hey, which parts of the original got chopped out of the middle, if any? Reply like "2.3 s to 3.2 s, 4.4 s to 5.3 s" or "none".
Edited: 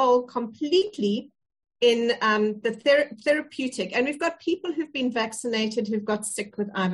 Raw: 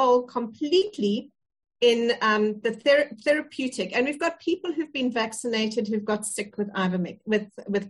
none